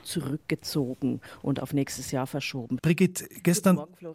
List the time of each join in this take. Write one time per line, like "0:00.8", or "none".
0:02.8